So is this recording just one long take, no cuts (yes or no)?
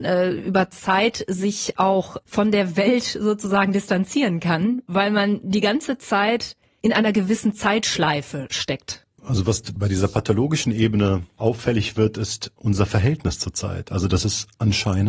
yes